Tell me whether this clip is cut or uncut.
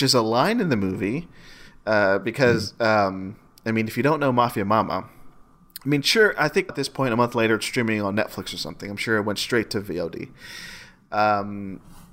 cut